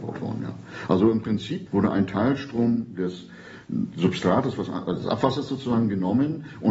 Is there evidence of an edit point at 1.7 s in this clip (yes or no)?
yes